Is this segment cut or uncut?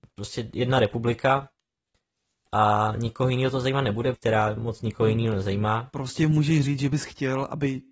cut